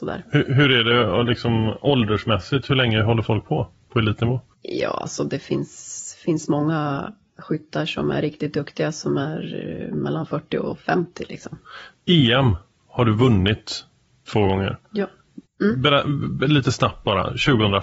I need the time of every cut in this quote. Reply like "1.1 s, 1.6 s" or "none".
15.4 s